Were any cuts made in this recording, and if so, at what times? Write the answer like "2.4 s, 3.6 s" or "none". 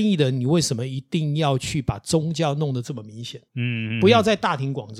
3.5 s